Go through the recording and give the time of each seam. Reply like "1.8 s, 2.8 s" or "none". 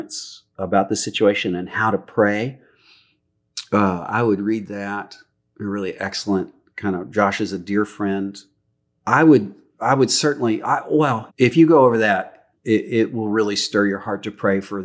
11.3 s